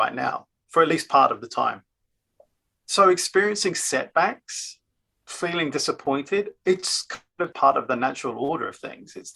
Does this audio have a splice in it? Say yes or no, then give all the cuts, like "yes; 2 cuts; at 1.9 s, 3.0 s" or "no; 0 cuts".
yes; 1 cut; at 7.5 s